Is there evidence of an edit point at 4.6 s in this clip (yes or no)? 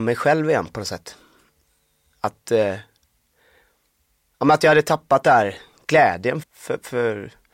no